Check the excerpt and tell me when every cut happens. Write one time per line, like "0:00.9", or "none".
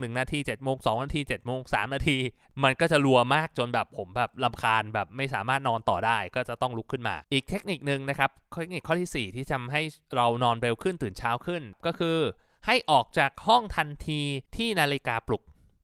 0:07.2
0:14.5